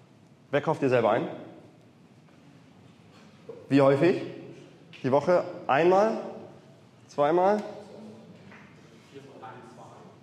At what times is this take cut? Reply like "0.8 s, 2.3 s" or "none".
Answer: none